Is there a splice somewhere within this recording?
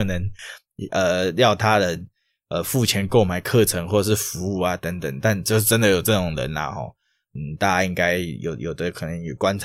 no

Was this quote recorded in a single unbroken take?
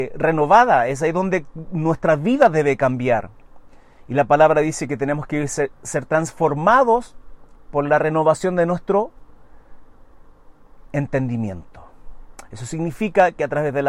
yes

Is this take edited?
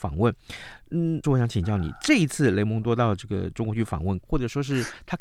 yes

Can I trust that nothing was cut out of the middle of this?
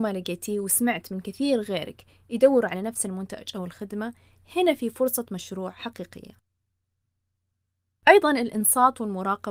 yes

